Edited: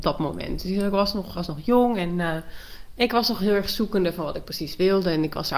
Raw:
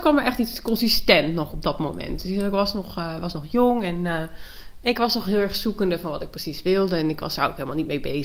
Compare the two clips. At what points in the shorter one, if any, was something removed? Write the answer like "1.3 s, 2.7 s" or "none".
1.3 s